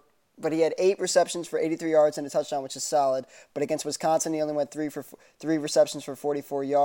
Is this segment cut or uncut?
uncut